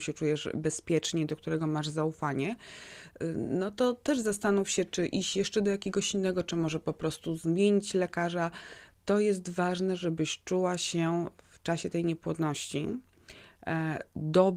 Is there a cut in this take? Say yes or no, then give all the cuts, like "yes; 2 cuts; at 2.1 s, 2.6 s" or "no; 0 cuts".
no; 0 cuts